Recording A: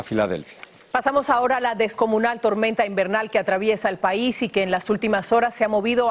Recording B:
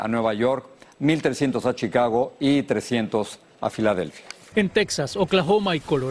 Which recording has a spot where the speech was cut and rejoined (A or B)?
B